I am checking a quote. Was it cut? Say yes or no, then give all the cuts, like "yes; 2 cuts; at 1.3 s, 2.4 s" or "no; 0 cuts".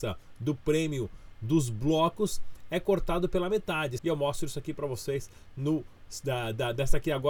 yes; 1 cut; at 4.0 s